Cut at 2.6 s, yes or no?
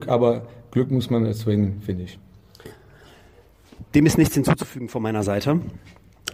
no